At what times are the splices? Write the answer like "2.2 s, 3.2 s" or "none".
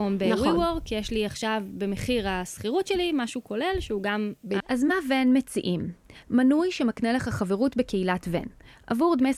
4.6 s